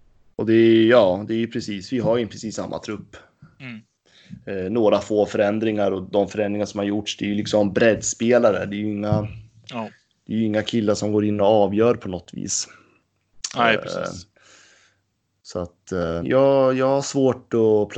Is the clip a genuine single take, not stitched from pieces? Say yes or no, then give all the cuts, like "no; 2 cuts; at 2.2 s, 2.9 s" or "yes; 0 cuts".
no; 1 cut; at 16.2 s